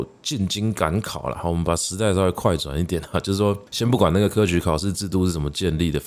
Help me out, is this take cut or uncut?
uncut